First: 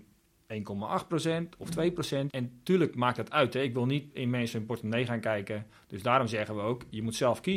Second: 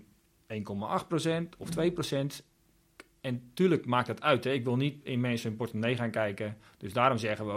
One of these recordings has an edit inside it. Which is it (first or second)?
first